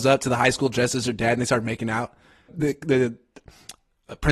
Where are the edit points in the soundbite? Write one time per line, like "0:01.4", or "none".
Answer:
0:02.5